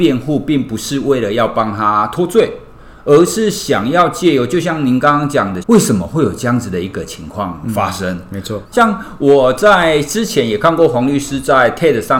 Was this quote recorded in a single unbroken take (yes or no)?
no